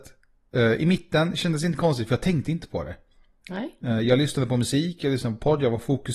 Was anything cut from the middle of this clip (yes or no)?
no